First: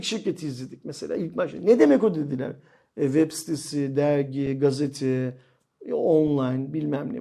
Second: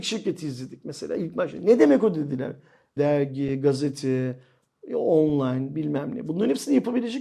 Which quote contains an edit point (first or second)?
second